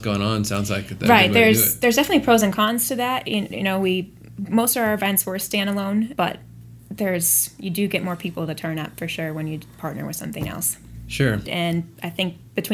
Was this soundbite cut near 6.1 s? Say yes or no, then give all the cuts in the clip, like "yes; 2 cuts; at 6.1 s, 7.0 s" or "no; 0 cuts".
yes; 2 cuts; at 6.1 s, 11.4 s